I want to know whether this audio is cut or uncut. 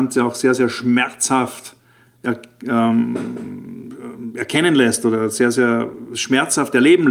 uncut